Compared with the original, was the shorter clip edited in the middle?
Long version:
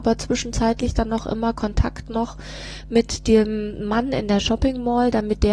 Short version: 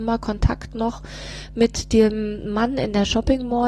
no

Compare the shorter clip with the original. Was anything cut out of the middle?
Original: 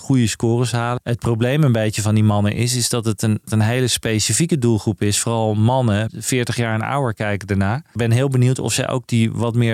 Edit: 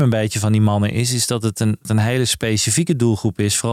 no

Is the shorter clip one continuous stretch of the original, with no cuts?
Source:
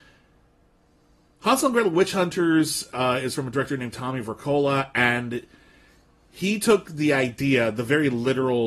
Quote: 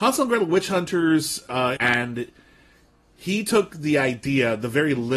no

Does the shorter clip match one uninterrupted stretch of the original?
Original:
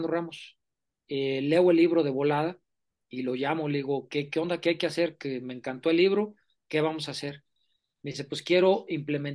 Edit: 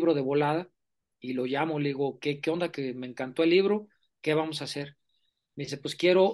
no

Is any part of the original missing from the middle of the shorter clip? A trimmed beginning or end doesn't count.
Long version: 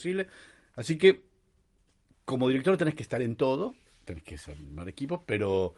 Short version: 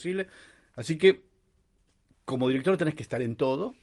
no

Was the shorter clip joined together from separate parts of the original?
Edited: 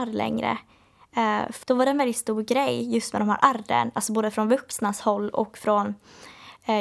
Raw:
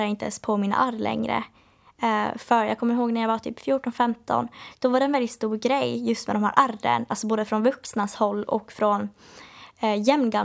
yes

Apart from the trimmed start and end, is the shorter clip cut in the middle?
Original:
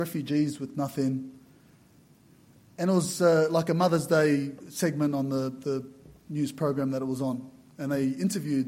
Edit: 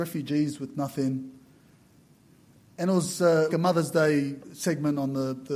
yes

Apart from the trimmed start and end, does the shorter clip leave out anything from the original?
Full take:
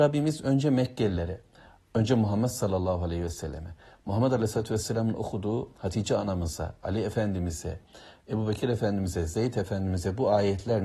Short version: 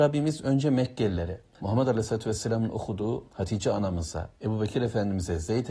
yes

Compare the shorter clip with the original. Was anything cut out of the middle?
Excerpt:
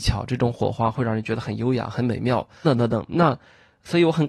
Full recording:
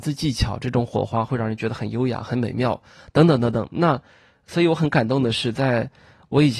yes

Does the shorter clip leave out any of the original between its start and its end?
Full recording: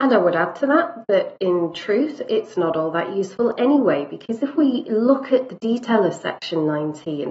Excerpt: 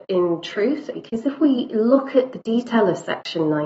yes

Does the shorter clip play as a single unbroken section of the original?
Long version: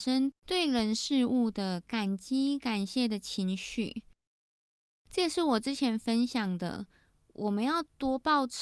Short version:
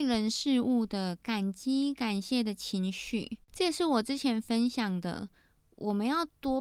no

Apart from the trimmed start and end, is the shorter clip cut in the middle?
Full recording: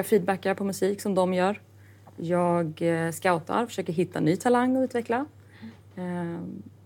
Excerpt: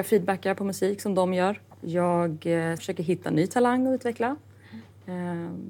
yes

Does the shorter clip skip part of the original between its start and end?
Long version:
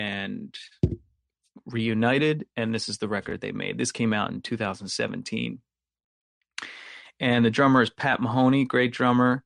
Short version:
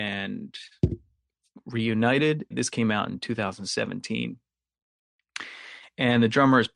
yes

